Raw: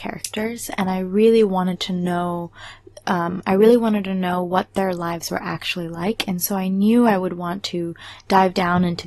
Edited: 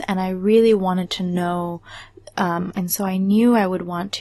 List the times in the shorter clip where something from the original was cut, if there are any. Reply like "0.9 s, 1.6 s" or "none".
2.7 s